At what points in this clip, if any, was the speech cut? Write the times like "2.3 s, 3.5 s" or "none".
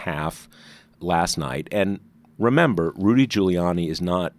none